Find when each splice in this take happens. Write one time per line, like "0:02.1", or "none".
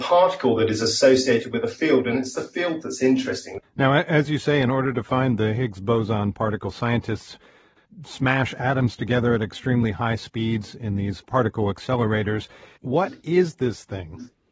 0:03.6
0:12.8